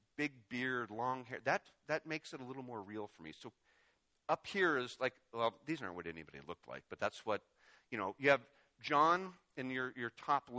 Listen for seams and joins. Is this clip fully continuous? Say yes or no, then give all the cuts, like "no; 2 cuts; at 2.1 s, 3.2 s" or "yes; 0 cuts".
yes; 0 cuts